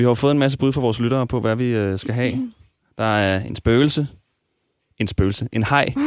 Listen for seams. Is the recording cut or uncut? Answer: uncut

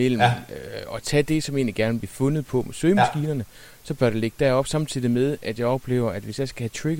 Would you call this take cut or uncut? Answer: uncut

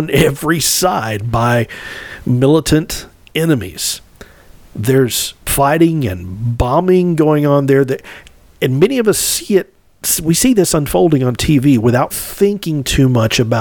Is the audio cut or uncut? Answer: cut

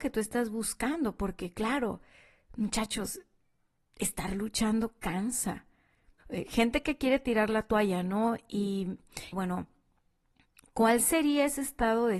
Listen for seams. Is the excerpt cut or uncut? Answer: cut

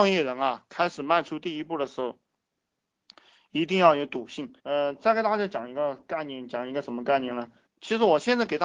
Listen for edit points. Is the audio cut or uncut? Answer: cut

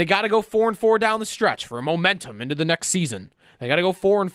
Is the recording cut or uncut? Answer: uncut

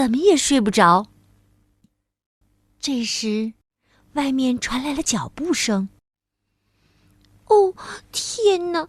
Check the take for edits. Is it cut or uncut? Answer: uncut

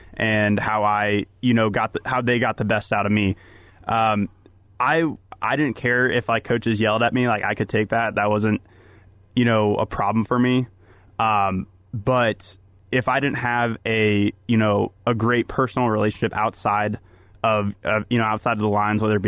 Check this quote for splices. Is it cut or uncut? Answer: uncut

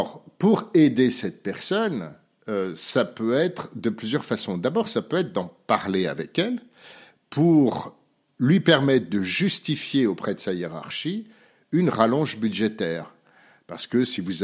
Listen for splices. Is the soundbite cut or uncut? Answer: uncut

